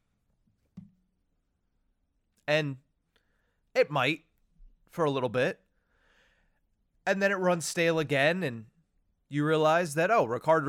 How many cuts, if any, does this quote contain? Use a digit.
0